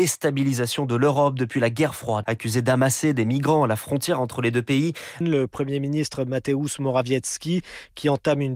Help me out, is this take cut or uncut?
cut